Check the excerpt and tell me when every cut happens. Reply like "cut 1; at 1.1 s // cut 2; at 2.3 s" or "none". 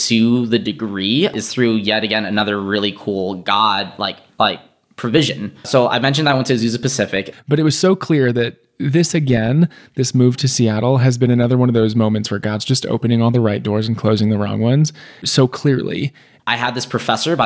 cut 1; at 7.3 s // cut 2; at 16.4 s